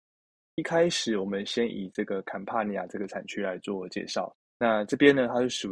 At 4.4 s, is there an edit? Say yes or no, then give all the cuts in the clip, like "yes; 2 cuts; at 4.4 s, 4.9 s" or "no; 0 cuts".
yes; 1 cut; at 4.4 s